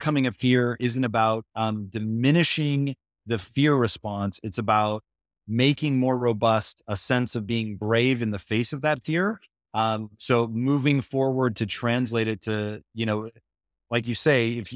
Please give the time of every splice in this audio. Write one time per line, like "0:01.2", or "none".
none